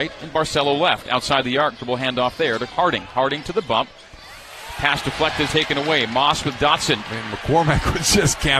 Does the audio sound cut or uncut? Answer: cut